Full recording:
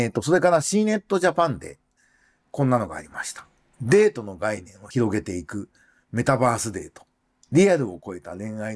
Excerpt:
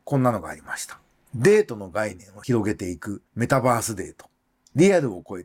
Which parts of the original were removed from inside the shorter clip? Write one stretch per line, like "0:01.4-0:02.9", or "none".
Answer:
0:05.7-0:06.0